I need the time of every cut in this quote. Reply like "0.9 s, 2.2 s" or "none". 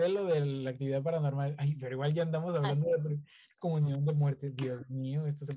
none